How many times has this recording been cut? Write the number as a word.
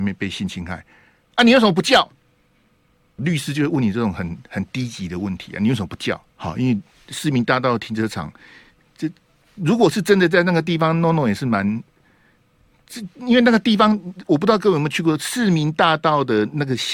two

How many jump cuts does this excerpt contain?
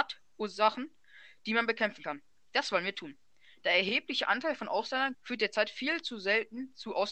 one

